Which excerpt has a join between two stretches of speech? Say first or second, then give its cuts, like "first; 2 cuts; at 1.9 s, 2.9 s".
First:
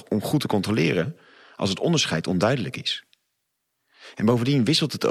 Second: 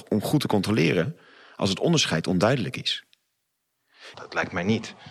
second; 1 cut; at 4.1 s